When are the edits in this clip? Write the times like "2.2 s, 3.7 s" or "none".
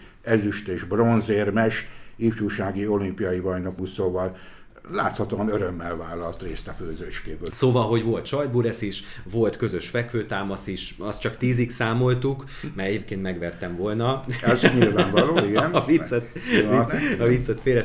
7.5 s, 16.9 s